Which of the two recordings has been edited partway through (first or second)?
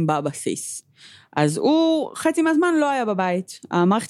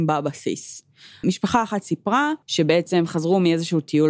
second